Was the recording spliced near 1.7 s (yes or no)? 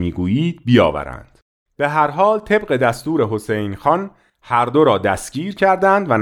yes